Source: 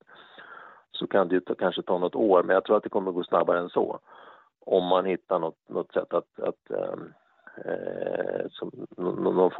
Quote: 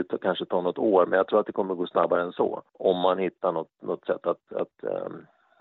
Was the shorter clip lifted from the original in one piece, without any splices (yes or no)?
no